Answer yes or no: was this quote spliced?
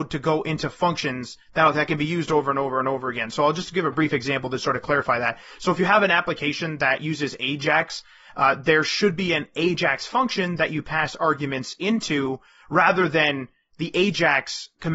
no